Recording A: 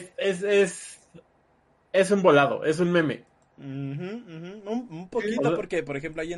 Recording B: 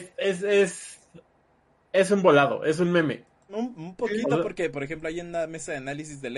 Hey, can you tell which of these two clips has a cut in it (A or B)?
B